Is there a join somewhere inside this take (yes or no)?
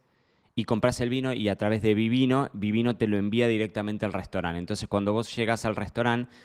no